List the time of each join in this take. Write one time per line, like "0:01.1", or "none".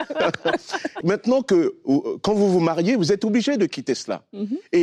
0:01.0